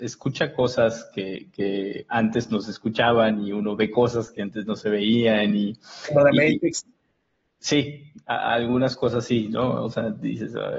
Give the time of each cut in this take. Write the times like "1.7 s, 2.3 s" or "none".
none